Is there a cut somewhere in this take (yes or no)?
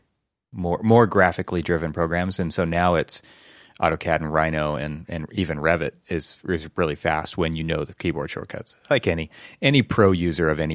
no